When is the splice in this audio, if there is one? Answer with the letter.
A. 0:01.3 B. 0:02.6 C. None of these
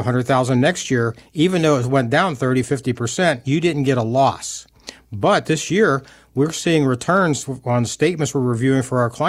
B